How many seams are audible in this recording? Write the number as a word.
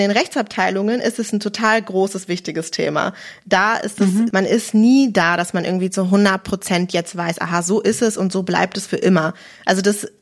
one